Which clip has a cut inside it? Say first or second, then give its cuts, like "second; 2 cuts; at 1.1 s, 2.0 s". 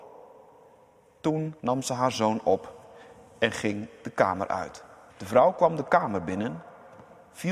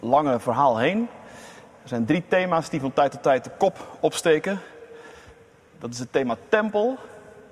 first; 2 cuts; at 1.6 s, 5.1 s